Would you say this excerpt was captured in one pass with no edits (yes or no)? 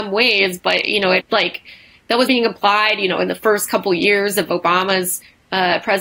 no